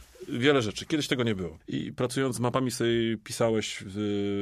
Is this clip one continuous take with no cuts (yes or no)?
no